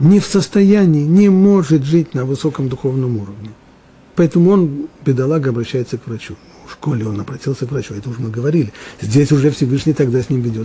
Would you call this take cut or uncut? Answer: uncut